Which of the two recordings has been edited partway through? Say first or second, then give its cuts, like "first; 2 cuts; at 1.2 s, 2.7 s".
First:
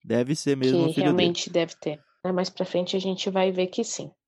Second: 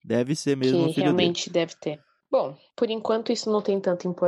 first; 1 cut; at 2.2 s